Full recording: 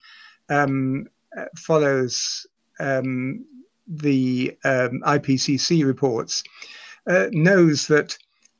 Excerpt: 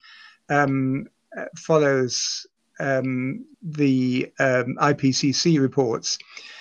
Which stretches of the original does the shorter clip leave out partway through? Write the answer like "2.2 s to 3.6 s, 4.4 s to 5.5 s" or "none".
3.5 s to 3.8 s